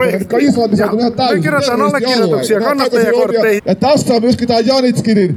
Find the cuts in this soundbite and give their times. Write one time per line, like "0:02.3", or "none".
0:03.6